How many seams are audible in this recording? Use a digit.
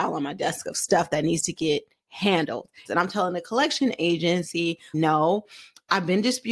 1